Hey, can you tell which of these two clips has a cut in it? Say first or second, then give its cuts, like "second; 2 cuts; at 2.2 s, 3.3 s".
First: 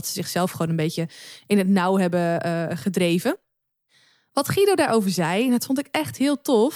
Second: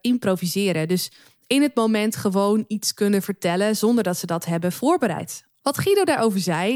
second; 1 cut; at 5.6 s